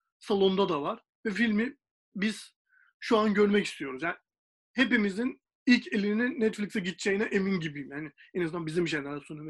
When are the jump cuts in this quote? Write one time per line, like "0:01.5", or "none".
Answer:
none